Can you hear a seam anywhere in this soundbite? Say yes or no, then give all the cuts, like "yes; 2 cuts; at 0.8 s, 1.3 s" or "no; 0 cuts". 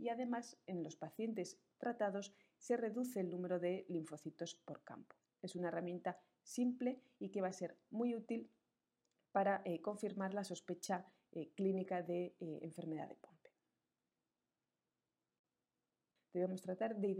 yes; 1 cut; at 16.2 s